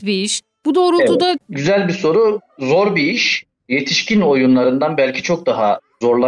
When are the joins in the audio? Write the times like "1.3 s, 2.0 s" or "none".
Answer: 1.4 s